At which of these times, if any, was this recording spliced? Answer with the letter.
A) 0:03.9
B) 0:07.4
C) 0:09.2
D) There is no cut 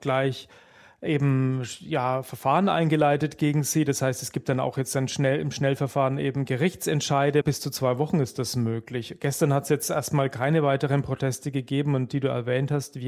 B